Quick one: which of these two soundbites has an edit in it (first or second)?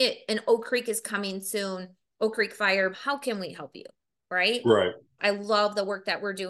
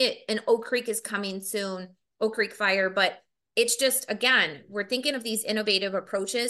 first